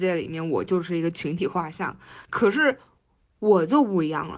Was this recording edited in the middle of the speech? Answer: no; 0 cuts

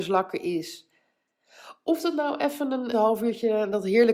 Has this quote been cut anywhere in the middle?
yes; 1 cut; at 2.9 s

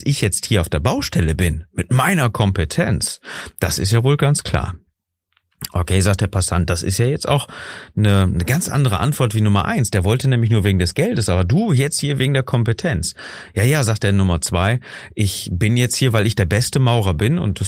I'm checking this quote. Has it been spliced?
no; 0 cuts

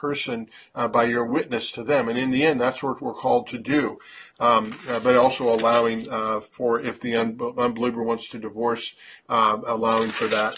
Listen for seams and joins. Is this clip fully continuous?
yes; 0 cuts

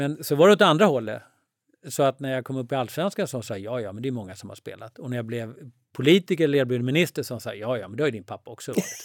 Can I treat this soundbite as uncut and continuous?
yes; 0 cuts

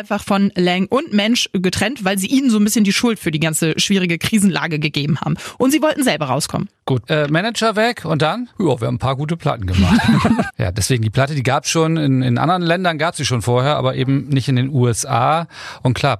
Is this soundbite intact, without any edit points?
no; 3 cuts; at 7.1 s, 8.5 s, 10.5 s

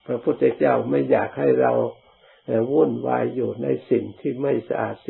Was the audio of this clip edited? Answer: no; 0 cuts

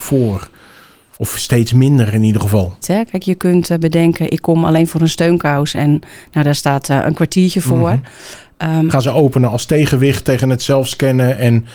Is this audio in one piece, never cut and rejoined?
no; 2 cuts; at 2.8 s, 8.9 s

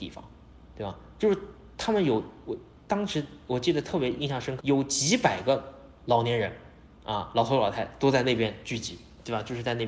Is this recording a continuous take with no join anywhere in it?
no; 1 cut; at 4.6 s

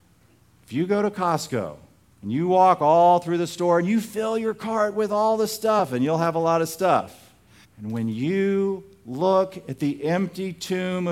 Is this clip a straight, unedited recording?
no; 1 cut; at 7.6 s

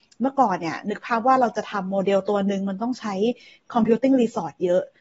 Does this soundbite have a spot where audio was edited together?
no; 0 cuts

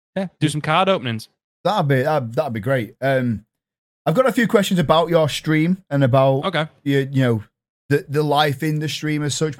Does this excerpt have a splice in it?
no; 0 cuts

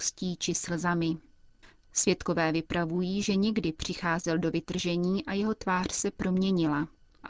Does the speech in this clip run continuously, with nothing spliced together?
no; 1 cut; at 1.7 s

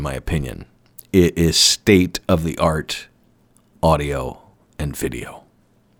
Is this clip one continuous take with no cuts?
yes; 0 cuts

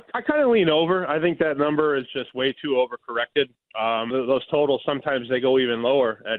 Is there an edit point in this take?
yes; 1 cut; at 4.1 s

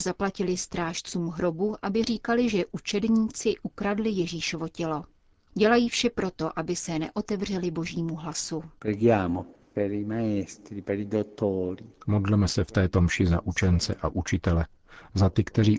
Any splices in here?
no; 0 cuts

